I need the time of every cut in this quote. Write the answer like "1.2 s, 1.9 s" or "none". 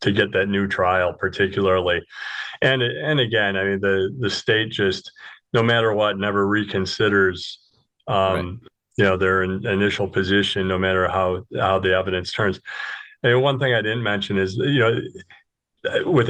none